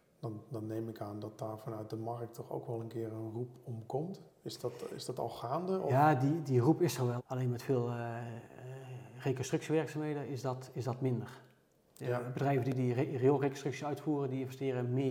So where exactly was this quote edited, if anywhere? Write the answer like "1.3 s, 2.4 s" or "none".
7.2 s, 11.9 s